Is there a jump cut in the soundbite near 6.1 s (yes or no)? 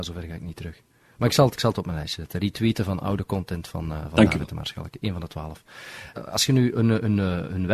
yes